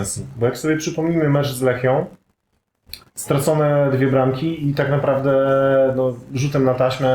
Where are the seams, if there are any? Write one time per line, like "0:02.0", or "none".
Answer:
0:03.1